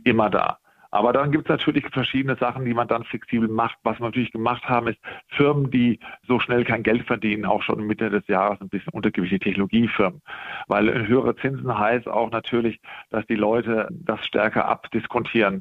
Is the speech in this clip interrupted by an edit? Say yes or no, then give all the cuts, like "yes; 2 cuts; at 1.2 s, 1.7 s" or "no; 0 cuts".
no; 0 cuts